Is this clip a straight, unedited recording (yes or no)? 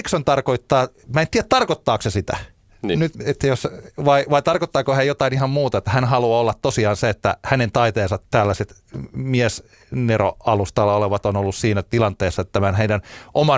yes